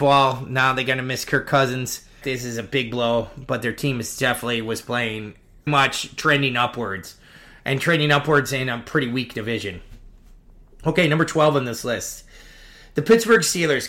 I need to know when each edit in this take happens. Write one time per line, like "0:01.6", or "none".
0:02.2
0:05.7